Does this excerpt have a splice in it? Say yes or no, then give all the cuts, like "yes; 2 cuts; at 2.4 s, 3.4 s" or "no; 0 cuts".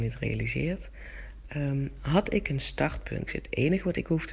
yes; 1 cut; at 3.3 s